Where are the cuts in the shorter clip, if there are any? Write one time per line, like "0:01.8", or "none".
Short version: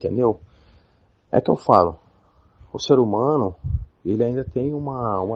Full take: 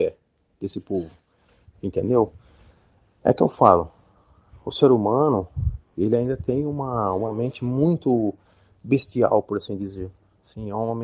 none